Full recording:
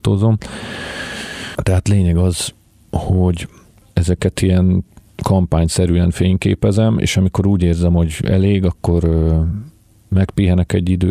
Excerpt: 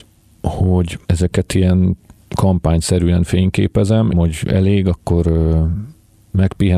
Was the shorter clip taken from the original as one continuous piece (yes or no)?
no